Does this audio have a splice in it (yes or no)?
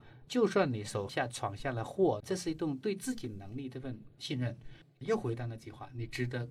yes